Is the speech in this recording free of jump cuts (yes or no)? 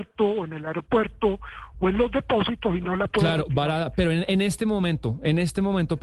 yes